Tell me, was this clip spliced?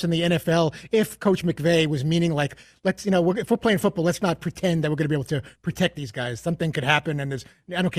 no; 0 cuts

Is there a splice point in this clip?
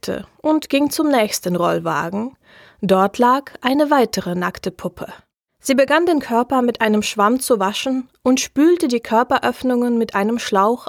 no; 0 cuts

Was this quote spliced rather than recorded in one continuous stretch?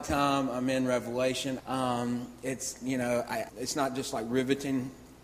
yes; 2 cuts; at 1.6 s, 3.5 s

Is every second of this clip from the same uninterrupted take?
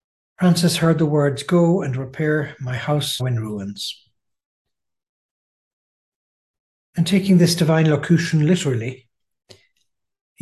no; 1 cut; at 3.2 s

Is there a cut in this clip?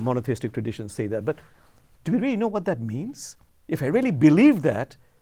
no; 0 cuts

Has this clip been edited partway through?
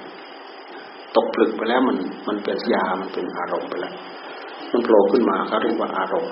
yes; 1 cut; at 2.7 s

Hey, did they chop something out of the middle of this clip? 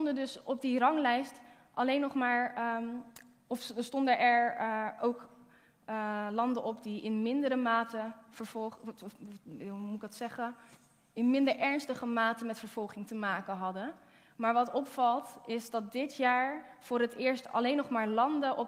no; 0 cuts

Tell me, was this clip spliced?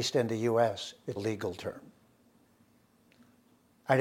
yes; 1 cut; at 1.2 s

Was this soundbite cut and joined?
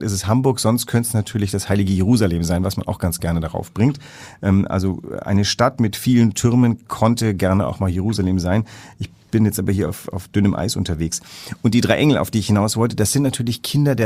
no; 0 cuts

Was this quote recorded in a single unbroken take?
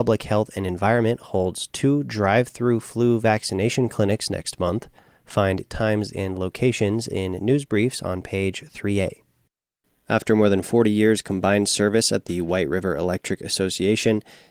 yes; 0 cuts

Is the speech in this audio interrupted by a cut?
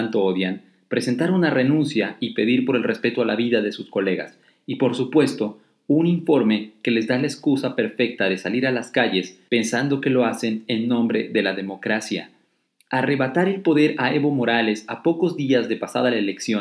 yes; 1 cut; at 9.5 s

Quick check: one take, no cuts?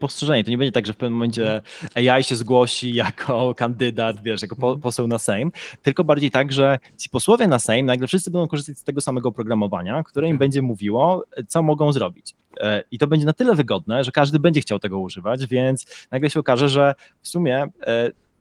yes; 0 cuts

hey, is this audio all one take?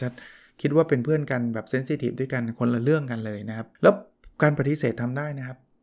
no; 1 cut; at 3.8 s

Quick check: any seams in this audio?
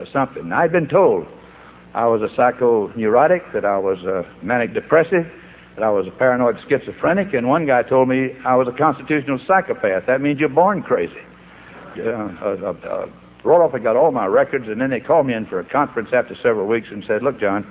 yes; 2 cuts; at 11.9 s, 13.4 s

